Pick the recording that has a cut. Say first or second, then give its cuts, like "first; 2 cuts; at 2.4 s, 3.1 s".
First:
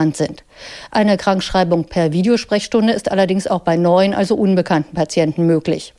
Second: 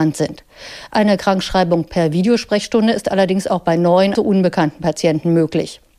second; 1 cut; at 4.1 s